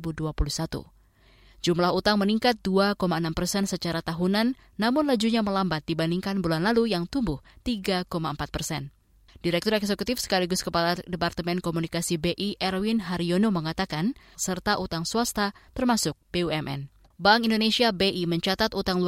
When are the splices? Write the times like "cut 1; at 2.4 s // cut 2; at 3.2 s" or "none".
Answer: cut 1; at 14.4 s // cut 2; at 17.1 s